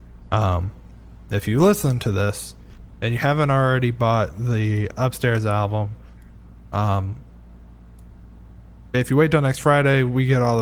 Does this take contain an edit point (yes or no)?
no